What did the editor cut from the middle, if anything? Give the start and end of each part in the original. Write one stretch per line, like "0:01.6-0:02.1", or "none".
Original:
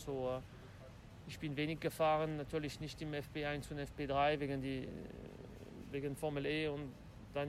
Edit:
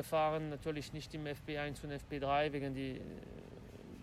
none

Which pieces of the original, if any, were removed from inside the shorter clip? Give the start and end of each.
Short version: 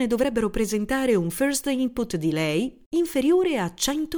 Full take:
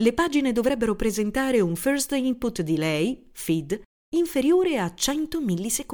0:03.3-0:04.1

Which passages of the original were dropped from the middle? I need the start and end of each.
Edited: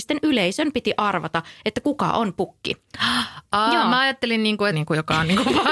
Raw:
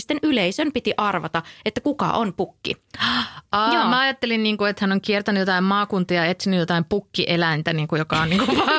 0:04.7-0:07.7

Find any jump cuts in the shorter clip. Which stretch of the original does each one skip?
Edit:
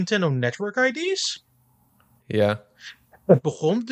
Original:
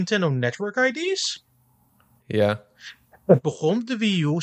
none

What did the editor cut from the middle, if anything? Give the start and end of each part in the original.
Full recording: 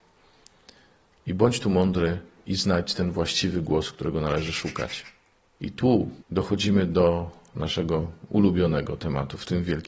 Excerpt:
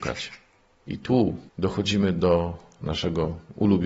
none

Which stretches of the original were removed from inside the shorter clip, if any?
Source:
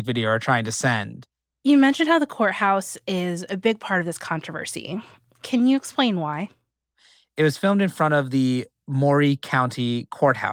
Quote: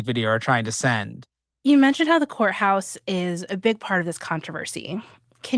none

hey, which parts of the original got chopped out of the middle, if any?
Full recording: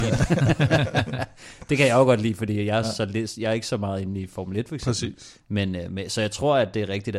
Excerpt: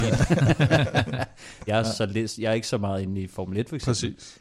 0:01.7-0:02.7

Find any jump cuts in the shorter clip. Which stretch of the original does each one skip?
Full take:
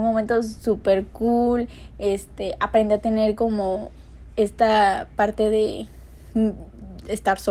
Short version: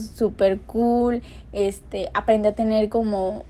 none

